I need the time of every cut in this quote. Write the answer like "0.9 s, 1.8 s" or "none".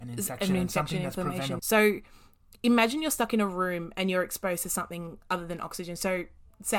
1.6 s

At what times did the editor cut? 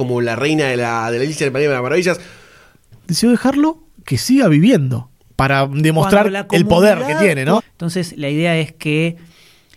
3.1 s, 7.6 s

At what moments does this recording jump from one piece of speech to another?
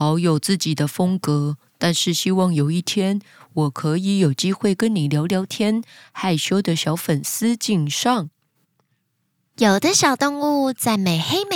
none

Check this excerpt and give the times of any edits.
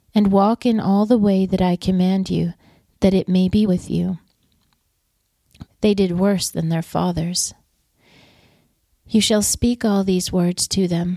3.7 s, 5.6 s

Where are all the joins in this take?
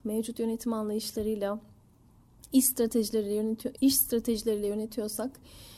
3.8 s

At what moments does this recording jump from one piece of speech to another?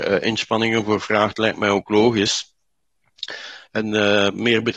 3.7 s

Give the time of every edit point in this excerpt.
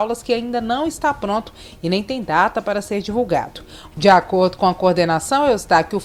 3.9 s

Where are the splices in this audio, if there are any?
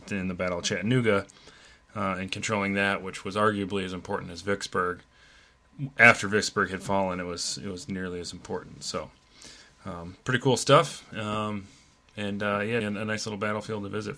12.8 s

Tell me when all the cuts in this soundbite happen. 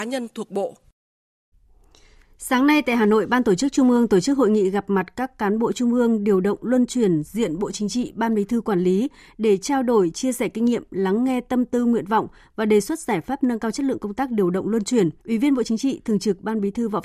15.2 s

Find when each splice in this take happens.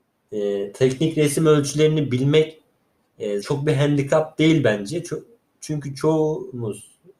3.4 s

